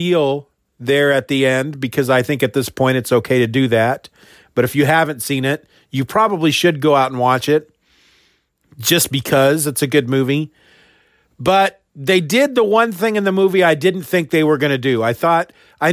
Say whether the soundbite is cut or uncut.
uncut